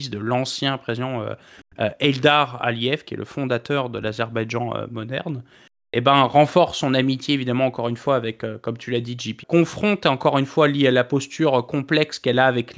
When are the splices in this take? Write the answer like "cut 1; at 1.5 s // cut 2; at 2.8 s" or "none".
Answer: cut 1; at 9.4 s